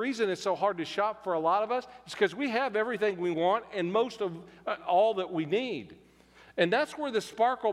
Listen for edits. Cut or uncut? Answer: cut